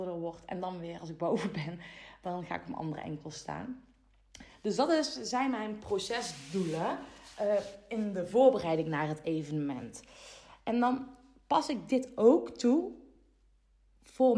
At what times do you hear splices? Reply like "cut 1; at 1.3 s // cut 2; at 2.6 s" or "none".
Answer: none